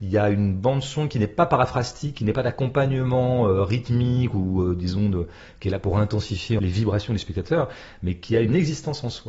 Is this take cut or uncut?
uncut